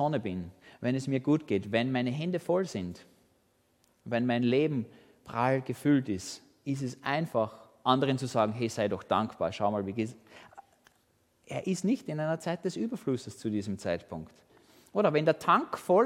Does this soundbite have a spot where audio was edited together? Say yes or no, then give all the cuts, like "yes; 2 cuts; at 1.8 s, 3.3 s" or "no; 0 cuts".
no; 0 cuts